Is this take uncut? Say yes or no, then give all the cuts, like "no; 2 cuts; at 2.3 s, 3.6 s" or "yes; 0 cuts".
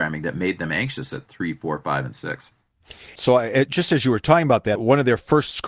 no; 2 cuts; at 3.2 s, 4.8 s